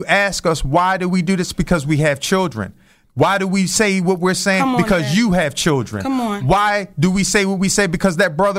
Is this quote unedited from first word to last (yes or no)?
yes